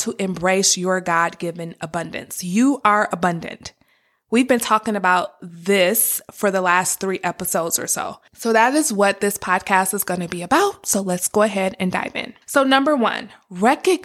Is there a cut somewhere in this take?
yes; 2 cuts; at 8.3 s, 12.4 s

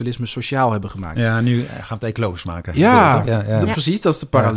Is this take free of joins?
yes; 0 cuts

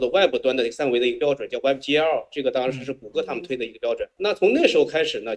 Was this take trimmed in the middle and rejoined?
no; 0 cuts

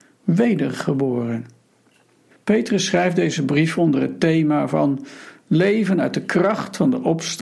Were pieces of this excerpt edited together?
yes; 1 cut; at 2.3 s

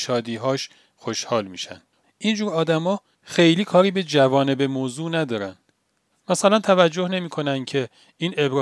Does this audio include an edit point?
yes; 1 cut; at 2.0 s

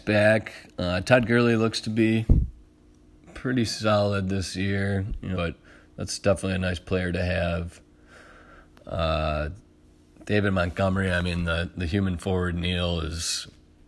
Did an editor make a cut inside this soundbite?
yes; 1 cut; at 5.4 s

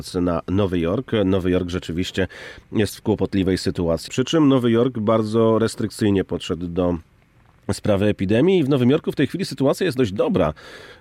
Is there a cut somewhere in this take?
yes; 1 cut; at 4.1 s

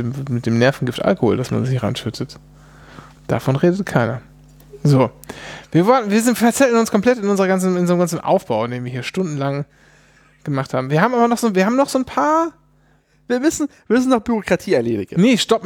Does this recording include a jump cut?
no; 0 cuts

